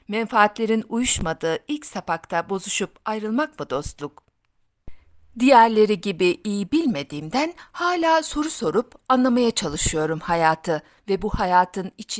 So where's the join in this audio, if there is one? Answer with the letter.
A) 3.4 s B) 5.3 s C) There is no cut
C